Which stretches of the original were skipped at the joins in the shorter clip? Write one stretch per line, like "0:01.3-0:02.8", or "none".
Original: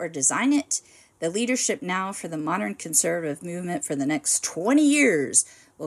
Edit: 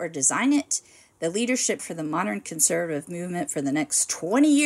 0:01.8-0:02.1